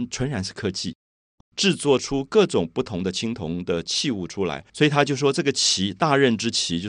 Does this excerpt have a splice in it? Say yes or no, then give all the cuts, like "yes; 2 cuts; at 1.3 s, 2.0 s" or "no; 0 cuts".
yes; 2 cuts; at 1.4 s, 4.7 s